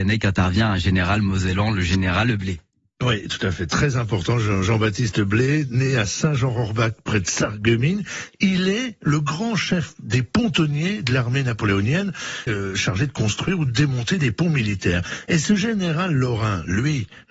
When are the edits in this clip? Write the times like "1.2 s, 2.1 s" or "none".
12.5 s